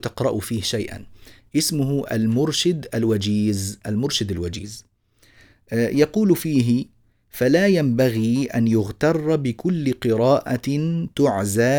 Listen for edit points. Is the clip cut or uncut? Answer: uncut